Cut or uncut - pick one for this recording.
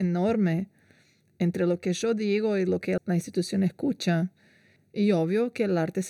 cut